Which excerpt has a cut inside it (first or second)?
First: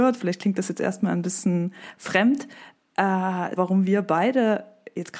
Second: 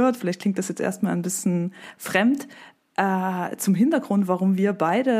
first